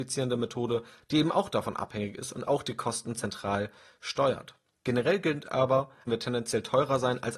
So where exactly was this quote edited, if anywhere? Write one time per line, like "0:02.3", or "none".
0:06.1

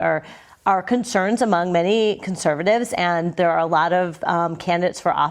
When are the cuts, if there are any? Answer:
none

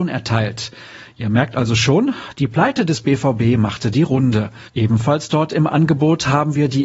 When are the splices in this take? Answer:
0:04.7

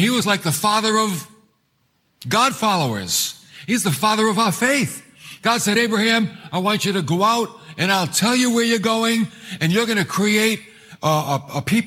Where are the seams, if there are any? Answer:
none

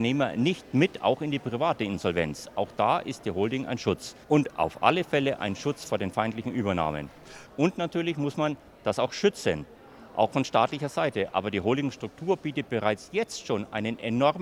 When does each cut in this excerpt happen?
0:04.2
0:07.5

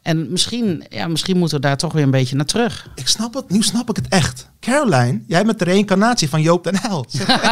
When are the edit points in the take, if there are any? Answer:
0:04.6

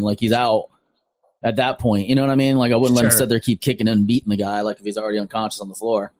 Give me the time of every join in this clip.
none

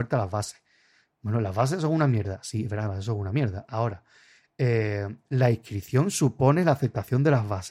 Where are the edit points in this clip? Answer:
none

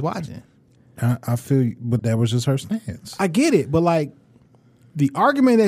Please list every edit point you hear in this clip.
0:02.0

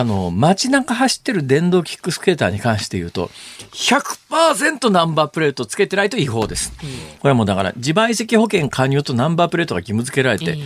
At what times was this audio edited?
0:07.1

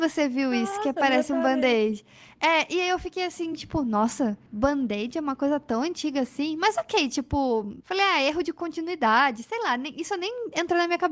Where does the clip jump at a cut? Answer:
none

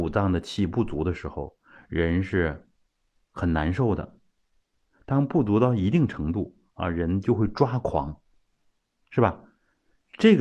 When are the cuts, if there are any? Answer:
none

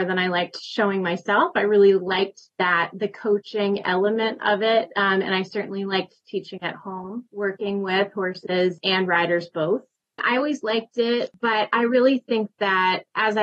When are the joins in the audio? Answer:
0:07.3
0:10.2

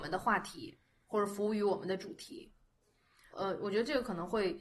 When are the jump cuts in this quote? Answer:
0:03.3

